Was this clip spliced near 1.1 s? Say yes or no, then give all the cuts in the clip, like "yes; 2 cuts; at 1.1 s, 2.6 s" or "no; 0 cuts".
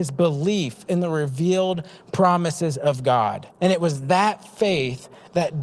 no; 1 cut; at 3.5 s